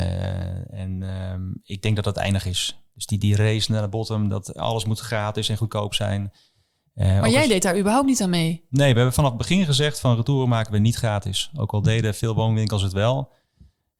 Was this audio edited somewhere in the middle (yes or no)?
no